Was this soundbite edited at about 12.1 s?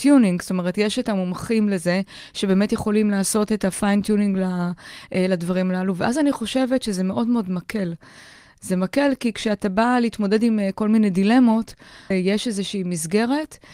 yes; 1 cut; at 12.1 s

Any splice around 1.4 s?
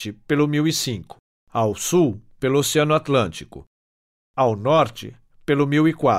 yes; 1 cut; at 1.4 s

